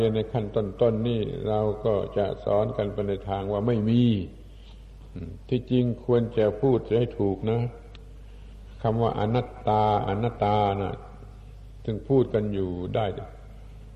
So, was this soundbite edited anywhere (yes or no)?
yes